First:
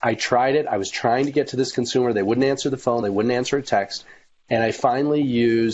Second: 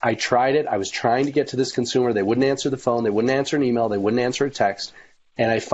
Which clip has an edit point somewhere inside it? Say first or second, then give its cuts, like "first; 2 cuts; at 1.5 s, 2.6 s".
first; 1 cut; at 3.0 s